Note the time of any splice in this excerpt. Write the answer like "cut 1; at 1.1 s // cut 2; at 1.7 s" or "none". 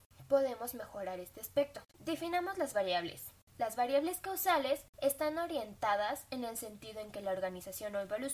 cut 1; at 1.9 s